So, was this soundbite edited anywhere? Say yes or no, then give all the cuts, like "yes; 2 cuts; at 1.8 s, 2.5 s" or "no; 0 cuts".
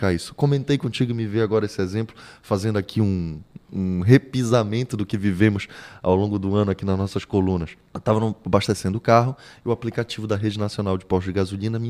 yes; 2 cuts; at 3.6 s, 7.9 s